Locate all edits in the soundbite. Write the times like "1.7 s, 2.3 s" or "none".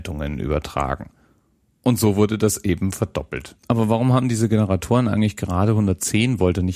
3.6 s